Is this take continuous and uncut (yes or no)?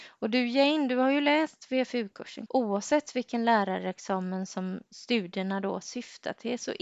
no